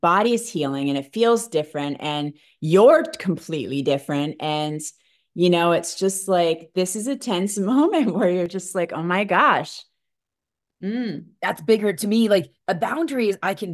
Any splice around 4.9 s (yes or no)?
no